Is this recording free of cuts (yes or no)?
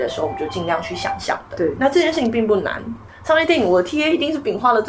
yes